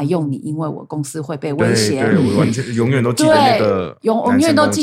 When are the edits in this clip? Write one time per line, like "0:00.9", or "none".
none